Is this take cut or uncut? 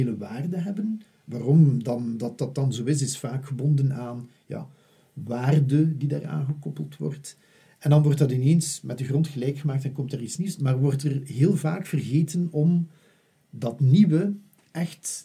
uncut